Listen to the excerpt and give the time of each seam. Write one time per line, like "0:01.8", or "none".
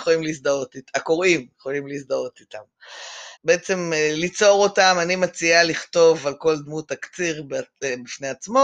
0:03.4